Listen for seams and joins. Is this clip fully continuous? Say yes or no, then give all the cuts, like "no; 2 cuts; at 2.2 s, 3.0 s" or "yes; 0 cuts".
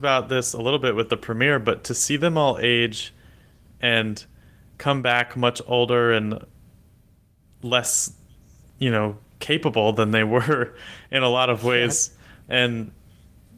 no; 1 cut; at 12.4 s